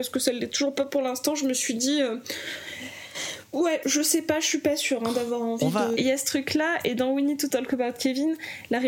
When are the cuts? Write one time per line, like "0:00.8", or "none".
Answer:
0:03.8
0:06.0